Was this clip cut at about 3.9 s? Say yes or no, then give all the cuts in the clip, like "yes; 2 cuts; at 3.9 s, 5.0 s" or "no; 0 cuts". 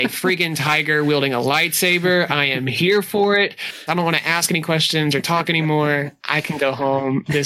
yes; 1 cut; at 3.9 s